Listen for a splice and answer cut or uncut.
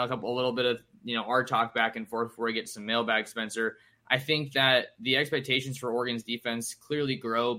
uncut